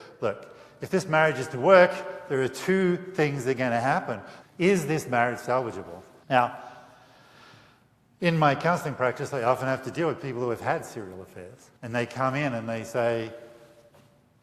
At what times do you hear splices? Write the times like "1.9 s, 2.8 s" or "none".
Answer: 4.4 s, 6.2 s, 11.8 s